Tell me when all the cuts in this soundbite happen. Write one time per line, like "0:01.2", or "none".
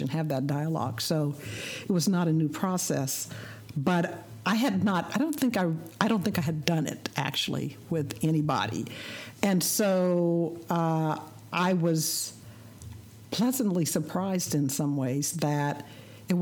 0:13.2